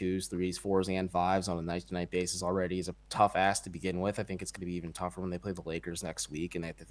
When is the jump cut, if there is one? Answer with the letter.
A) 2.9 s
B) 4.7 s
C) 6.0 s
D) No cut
A